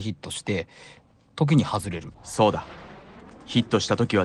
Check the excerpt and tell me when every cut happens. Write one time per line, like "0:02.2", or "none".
0:02.1